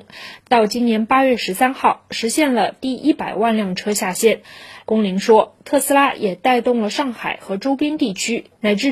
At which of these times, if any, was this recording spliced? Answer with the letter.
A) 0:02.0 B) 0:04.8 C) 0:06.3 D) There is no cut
D